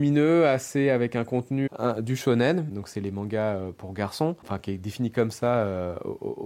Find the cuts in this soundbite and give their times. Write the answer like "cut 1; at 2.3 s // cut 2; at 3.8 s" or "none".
cut 1; at 1.7 s